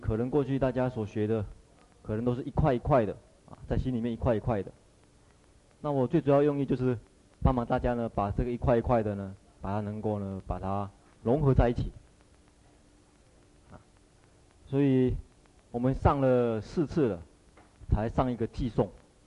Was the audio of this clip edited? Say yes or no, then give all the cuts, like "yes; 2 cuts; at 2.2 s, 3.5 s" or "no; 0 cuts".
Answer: no; 0 cuts